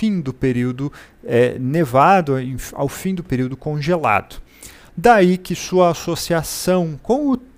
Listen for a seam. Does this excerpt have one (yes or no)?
yes